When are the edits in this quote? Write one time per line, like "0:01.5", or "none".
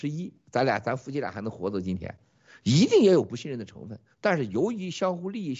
none